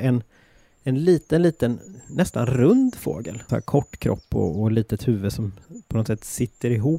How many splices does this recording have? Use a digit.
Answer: 1